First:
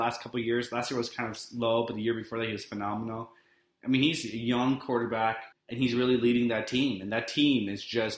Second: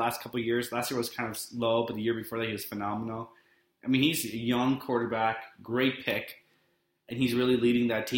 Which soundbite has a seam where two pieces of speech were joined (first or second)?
first